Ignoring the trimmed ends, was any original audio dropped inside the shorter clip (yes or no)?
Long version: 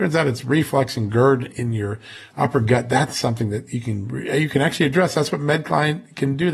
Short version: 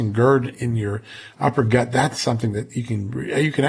no